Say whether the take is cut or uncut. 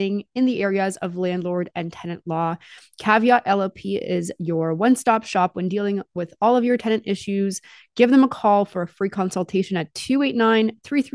uncut